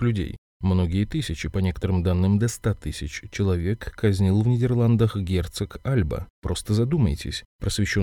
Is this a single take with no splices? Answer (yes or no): no